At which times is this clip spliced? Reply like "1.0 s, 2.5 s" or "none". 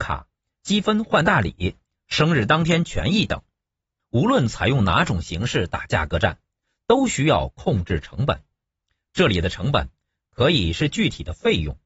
4.0 s